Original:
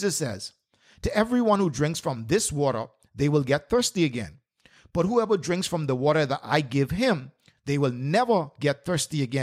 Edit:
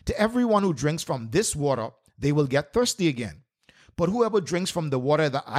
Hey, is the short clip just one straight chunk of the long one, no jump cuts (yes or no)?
yes